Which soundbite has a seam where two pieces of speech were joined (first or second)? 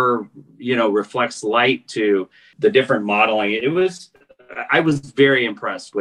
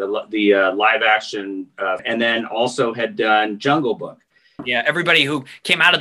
second